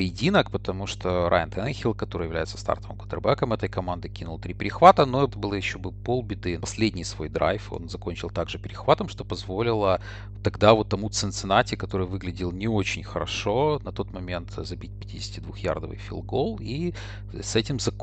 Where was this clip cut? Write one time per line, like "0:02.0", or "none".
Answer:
0:05.3
0:06.6